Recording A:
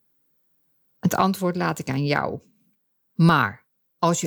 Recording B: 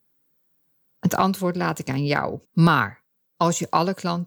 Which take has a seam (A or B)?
B